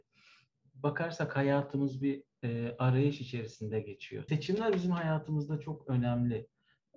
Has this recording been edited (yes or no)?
yes